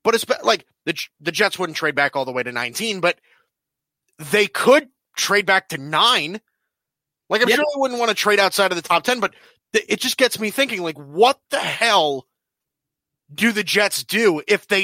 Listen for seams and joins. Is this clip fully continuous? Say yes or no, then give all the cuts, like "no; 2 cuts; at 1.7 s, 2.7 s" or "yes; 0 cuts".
yes; 0 cuts